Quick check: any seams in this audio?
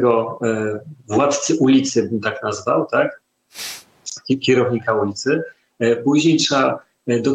no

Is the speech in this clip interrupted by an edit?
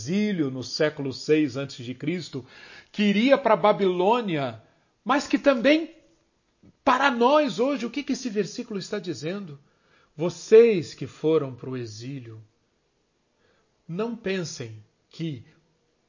no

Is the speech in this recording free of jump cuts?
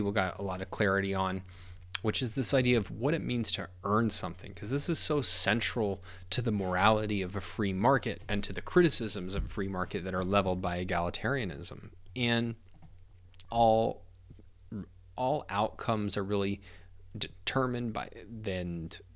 no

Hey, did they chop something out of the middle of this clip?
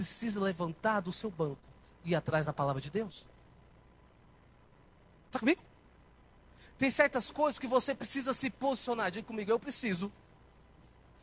no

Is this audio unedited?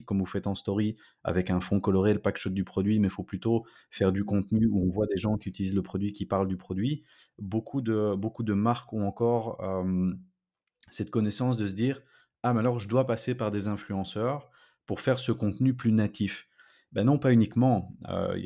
yes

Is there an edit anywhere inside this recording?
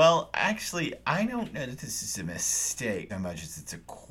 yes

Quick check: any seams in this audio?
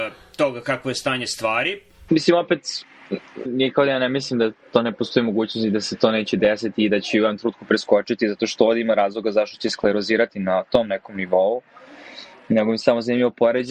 yes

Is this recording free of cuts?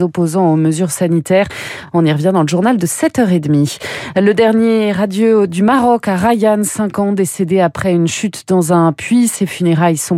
yes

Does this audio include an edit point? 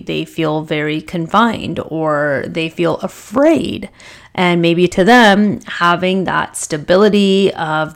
no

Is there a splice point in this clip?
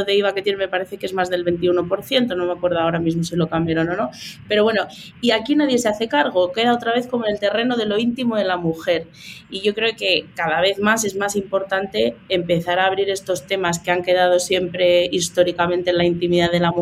no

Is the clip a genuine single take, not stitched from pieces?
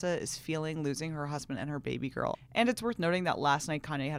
no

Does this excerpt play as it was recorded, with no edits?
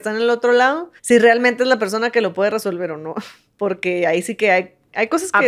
no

